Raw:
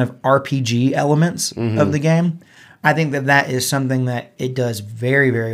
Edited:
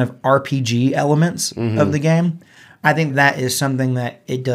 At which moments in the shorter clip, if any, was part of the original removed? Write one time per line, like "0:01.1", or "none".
0:03.1

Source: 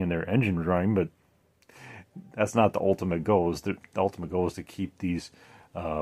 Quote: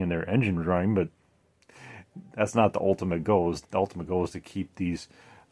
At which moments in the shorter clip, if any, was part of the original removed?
0:03.6

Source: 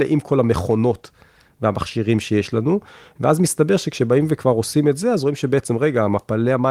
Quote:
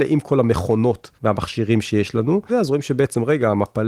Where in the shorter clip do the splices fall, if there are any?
0:01.2
0:02.5

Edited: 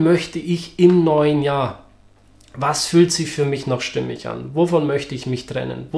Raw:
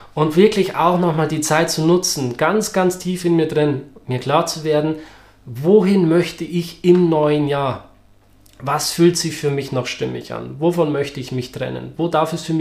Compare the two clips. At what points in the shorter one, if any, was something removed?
none

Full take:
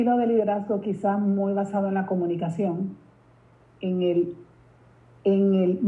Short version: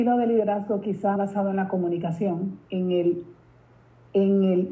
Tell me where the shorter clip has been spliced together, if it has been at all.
0:01.2
0:02.6

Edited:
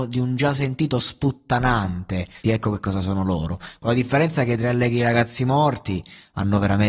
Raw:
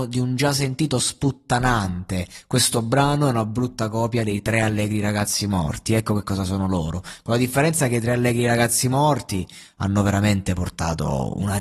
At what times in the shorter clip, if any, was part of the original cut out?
0:02.4

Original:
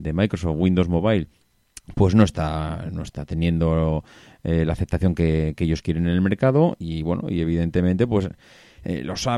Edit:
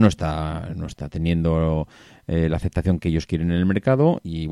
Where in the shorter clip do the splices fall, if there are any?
0:03.0

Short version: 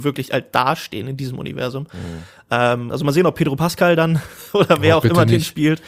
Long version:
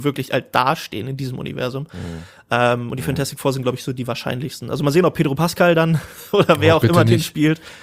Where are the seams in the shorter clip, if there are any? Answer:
0:02.9

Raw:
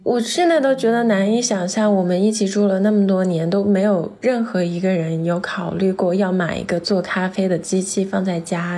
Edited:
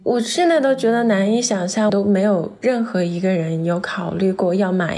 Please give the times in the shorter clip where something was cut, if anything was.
0:01.9

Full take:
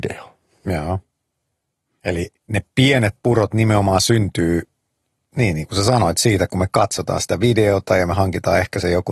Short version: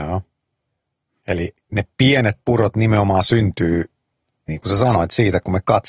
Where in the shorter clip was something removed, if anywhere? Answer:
0:04.5

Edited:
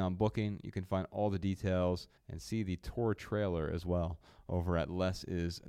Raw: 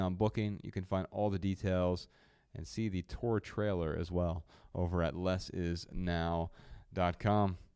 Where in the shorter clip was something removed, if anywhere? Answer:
0:02.2

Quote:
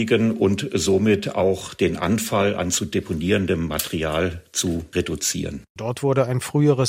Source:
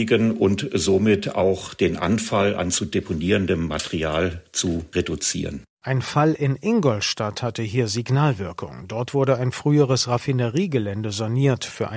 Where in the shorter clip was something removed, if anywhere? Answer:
0:05.8

